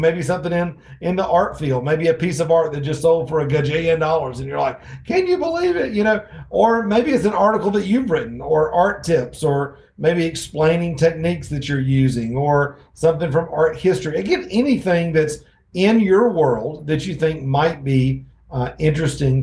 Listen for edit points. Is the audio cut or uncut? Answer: uncut